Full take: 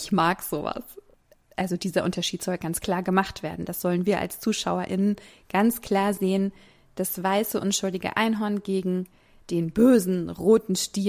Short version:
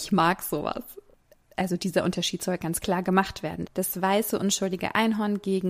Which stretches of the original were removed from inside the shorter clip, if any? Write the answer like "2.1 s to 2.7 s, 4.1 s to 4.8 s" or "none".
3.7 s to 6.9 s